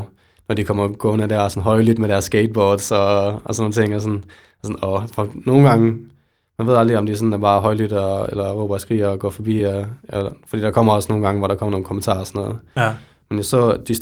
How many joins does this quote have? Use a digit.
0